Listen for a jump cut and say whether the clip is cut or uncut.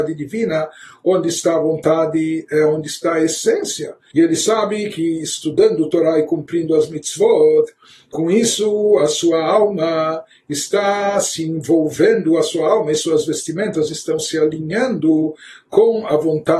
cut